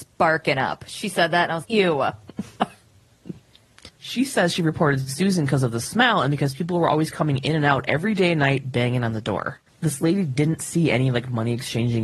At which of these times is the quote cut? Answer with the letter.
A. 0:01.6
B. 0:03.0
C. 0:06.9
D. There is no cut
A